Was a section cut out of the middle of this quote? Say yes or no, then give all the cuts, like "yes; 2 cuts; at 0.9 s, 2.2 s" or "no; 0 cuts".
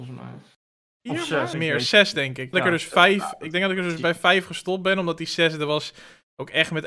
yes; 2 cuts; at 1.5 s, 2.5 s